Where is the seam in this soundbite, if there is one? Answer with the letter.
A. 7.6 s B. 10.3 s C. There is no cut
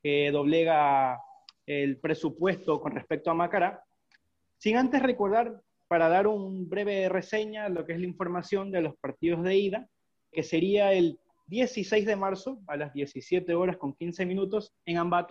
B